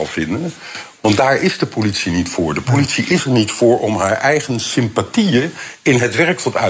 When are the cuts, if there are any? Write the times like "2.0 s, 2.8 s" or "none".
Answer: none

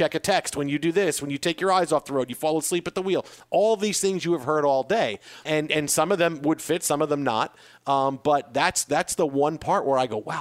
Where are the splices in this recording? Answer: 5.5 s

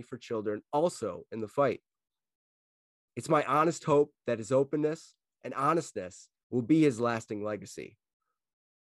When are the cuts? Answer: none

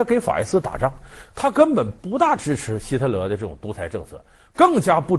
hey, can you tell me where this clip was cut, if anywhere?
none

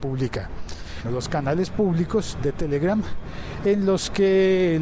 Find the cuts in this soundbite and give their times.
1.0 s

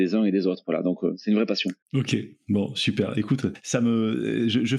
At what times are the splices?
1.8 s

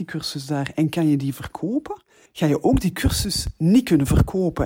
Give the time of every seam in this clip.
2.3 s

